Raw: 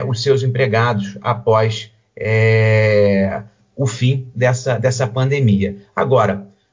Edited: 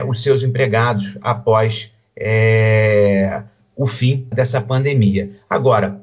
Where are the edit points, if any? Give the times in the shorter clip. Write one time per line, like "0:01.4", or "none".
0:04.3